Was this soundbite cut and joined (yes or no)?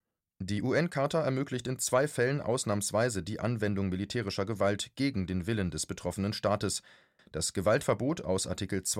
yes